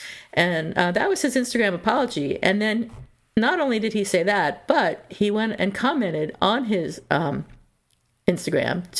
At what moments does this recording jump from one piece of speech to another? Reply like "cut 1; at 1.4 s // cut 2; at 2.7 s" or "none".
none